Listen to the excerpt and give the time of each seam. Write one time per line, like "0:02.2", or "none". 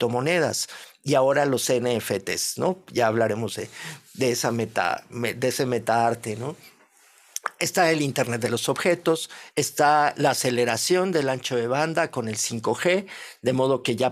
0:09.5